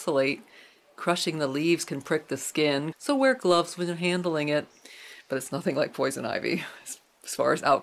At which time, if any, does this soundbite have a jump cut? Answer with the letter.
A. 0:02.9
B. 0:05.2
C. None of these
A